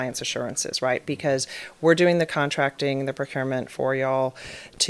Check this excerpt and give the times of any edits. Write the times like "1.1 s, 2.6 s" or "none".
none